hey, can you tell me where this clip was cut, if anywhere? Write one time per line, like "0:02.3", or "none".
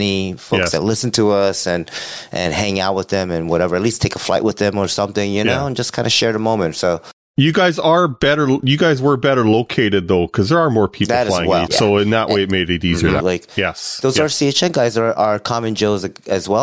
0:11.7
0:13.2